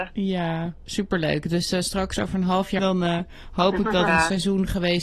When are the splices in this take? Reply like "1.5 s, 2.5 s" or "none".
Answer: 2.8 s, 4.1 s